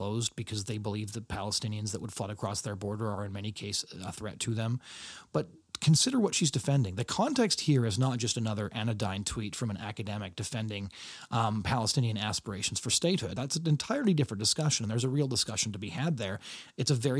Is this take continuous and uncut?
yes; 0 cuts

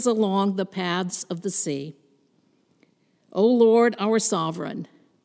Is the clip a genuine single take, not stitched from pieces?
yes; 0 cuts

